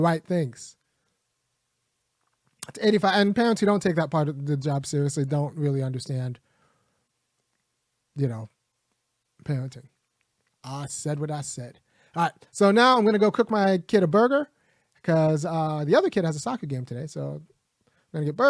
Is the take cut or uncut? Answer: uncut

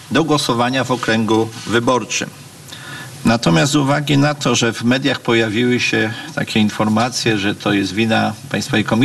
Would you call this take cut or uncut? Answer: cut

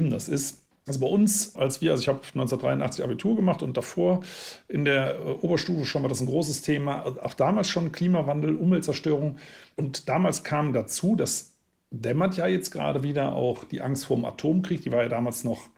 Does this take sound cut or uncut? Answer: uncut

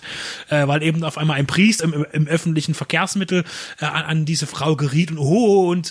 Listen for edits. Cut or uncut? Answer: cut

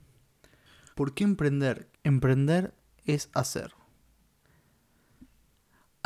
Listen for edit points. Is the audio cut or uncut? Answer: cut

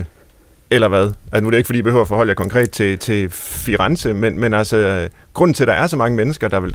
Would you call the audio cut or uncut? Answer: uncut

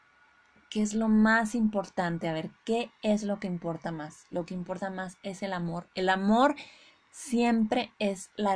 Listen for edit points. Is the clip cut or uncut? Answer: uncut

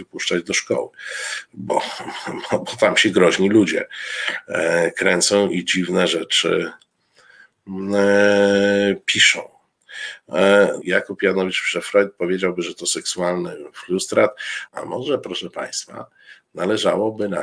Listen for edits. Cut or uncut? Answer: cut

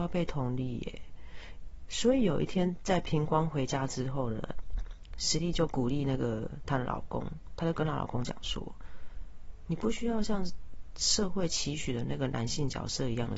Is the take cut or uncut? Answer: uncut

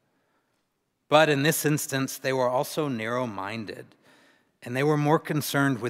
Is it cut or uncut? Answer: uncut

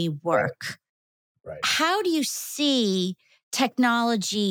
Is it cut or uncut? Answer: uncut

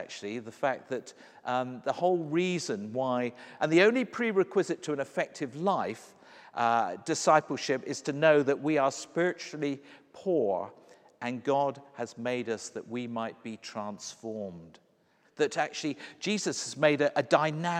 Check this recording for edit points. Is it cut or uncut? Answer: cut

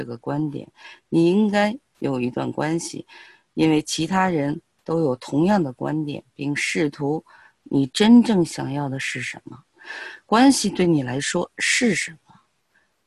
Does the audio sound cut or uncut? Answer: cut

